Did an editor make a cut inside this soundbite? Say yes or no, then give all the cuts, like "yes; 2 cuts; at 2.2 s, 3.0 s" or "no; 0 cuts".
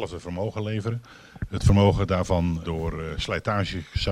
yes; 1 cut; at 2.6 s